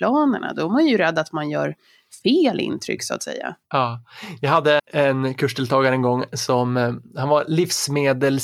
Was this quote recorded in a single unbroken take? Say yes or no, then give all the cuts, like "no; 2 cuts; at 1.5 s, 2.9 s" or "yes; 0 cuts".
no; 2 cuts; at 3.6 s, 4.8 s